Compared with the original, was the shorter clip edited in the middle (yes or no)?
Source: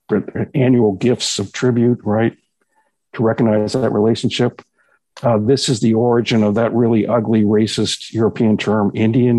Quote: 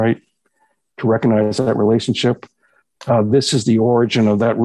no